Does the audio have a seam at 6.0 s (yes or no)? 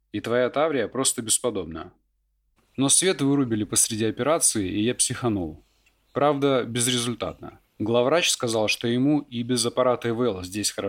no